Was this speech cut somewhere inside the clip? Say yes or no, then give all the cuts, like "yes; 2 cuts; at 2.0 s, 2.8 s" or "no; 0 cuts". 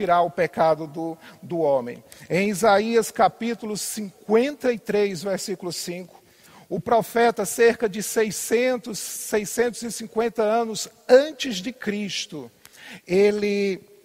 no; 0 cuts